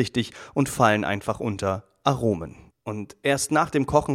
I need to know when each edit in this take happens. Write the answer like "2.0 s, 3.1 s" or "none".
2.7 s